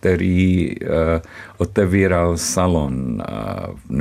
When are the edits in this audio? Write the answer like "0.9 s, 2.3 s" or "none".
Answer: none